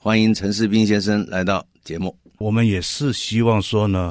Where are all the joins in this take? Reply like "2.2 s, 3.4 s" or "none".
2.4 s